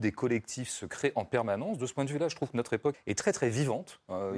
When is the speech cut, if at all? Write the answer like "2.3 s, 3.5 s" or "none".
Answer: 2.9 s